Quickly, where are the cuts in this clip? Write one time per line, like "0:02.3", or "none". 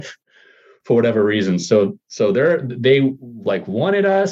none